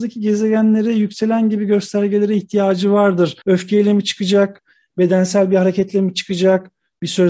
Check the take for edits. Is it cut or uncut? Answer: cut